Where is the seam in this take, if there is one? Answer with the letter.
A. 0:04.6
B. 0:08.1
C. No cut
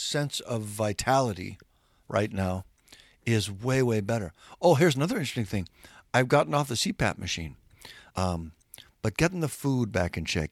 B